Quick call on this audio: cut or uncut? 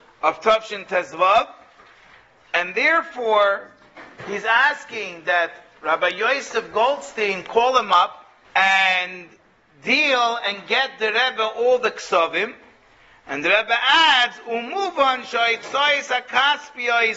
cut